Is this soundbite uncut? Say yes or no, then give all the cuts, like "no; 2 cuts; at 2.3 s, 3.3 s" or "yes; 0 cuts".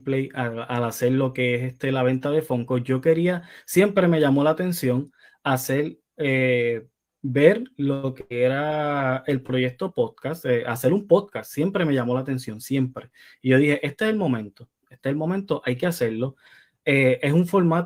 yes; 0 cuts